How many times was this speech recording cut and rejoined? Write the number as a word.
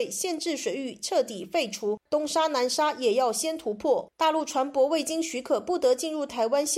one